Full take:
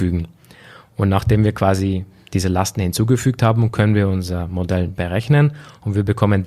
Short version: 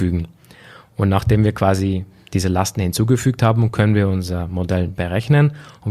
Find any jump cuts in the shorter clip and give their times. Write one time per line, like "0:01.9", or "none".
none